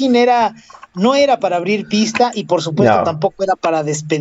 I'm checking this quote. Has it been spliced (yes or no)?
no